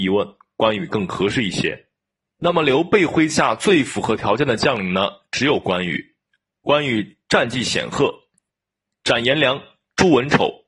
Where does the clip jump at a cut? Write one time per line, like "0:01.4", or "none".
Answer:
0:02.3